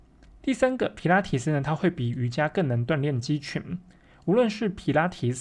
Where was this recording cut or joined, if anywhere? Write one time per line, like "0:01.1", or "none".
none

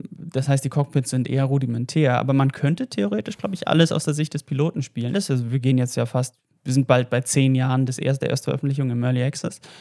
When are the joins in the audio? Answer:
0:05.1

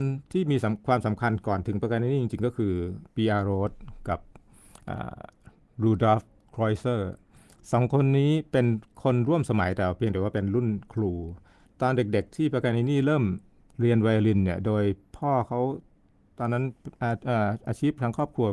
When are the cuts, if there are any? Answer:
none

